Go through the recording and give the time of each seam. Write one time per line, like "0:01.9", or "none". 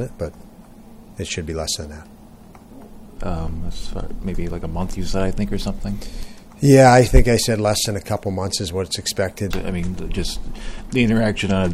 0:03.2
0:04.2
0:09.5